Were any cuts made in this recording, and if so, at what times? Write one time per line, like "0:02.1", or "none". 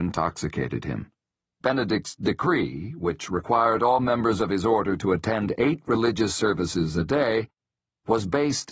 0:01.6